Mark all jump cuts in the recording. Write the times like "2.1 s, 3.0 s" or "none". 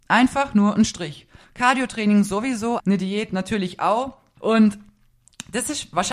1.4 s, 2.8 s, 4.4 s